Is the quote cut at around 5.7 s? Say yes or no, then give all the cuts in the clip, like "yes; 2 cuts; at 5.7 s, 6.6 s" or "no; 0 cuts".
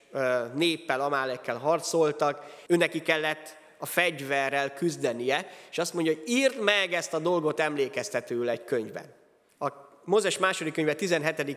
no; 2 cuts; at 2.7 s, 9.5 s